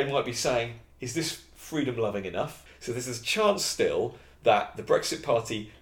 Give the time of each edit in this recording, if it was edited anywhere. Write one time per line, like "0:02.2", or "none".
0:02.7